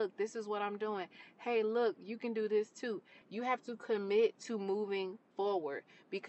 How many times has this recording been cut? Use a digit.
1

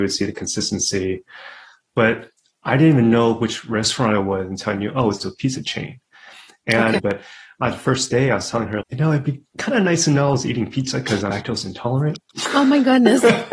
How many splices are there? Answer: 3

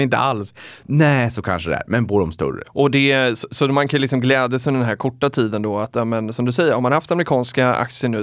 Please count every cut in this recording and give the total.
1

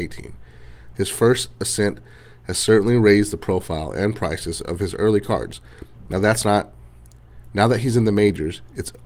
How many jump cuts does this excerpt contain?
1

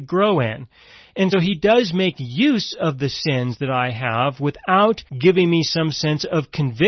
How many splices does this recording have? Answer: 2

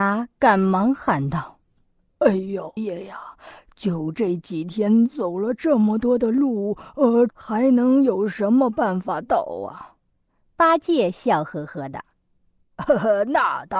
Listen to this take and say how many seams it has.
3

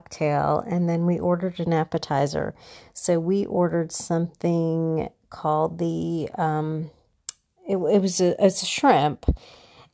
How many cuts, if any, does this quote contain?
0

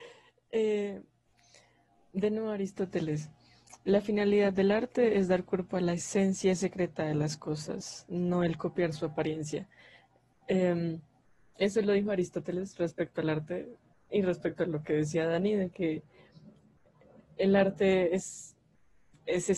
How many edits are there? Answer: 0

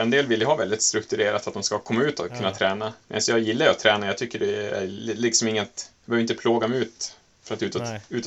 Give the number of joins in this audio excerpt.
1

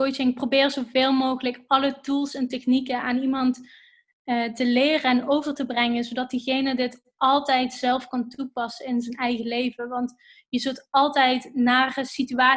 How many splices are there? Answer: 0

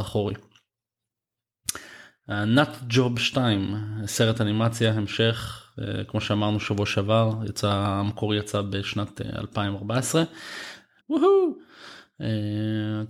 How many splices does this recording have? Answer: 1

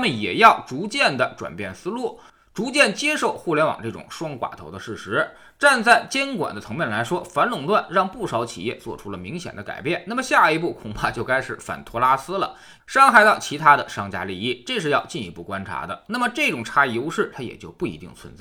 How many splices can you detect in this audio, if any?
2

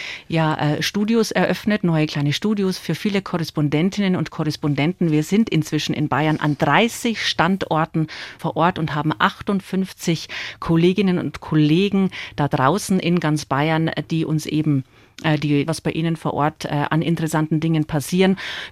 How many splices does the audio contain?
2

